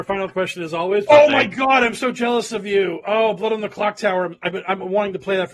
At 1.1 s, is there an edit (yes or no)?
yes